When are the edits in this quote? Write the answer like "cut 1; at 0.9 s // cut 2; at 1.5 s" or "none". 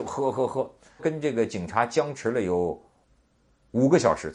cut 1; at 1.0 s